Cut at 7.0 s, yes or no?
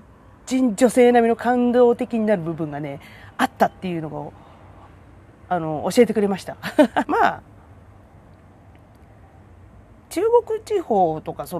yes